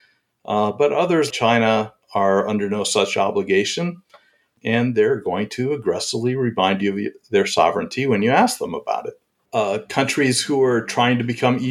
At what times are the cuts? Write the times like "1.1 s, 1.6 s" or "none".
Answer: 1.3 s, 9.5 s